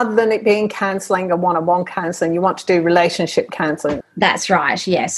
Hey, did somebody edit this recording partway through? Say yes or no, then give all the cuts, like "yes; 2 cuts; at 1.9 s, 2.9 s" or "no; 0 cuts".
yes; 1 cut; at 4.0 s